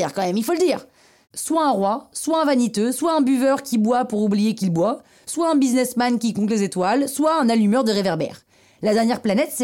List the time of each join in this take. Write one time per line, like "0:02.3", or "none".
0:01.2